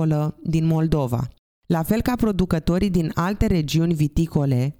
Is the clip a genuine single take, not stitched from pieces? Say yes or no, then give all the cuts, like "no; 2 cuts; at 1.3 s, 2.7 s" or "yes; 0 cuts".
yes; 0 cuts